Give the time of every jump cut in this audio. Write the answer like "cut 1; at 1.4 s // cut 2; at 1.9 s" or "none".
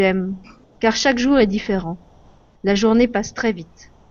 cut 1; at 2.6 s